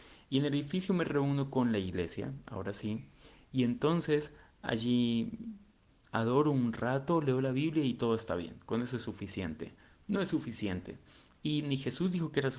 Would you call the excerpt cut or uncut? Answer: uncut